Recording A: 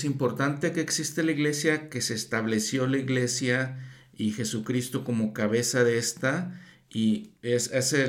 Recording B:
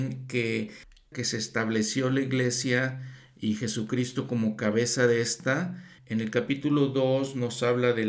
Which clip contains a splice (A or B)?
B